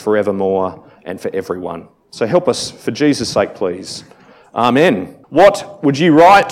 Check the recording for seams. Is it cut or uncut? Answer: cut